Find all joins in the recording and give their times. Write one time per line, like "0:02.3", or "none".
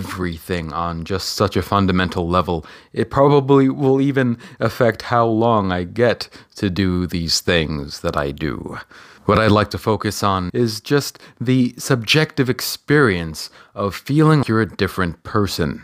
0:10.5
0:14.4